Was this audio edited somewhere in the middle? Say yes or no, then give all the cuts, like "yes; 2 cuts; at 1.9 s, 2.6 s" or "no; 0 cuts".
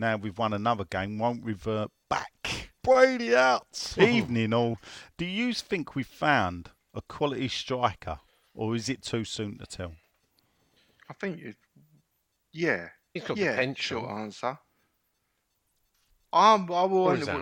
yes; 3 cuts; at 2.8 s, 3.9 s, 5.1 s